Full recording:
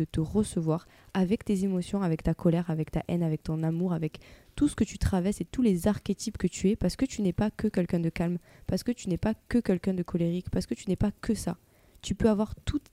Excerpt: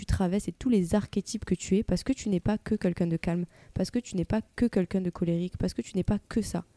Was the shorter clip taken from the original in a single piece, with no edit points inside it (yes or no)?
yes